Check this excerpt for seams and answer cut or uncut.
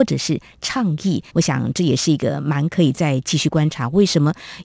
cut